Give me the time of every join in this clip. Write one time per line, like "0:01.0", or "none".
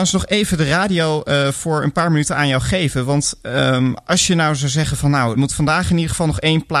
0:05.3